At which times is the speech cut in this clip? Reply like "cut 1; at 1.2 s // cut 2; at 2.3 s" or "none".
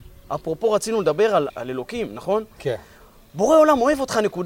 cut 1; at 1.5 s